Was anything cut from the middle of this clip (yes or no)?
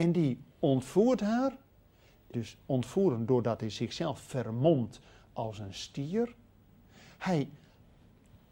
yes